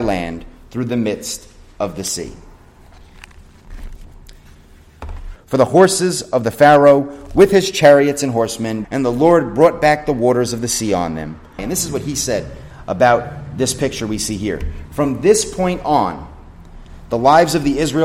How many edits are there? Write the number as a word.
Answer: three